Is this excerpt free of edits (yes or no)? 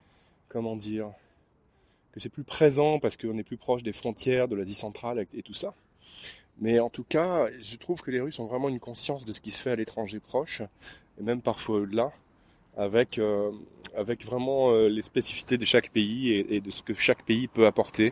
yes